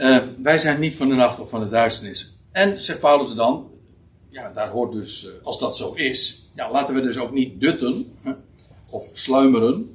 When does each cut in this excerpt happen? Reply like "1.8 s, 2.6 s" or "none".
5.4 s